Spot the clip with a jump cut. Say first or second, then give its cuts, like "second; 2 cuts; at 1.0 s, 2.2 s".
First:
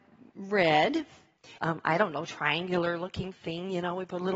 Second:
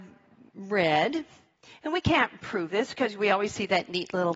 first; 1 cut; at 1.6 s